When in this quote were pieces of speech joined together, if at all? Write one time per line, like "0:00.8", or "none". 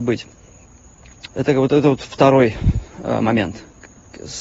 0:01.3